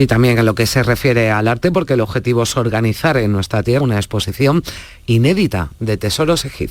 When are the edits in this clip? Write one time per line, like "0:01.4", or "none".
0:03.8